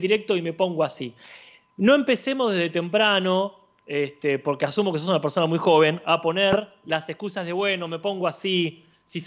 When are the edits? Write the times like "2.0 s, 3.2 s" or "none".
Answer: none